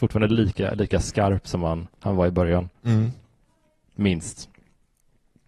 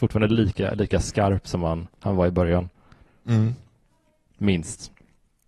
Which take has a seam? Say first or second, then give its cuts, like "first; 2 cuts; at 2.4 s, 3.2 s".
first; 1 cut; at 2.8 s